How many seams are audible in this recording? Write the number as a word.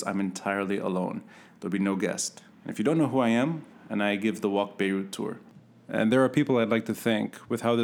two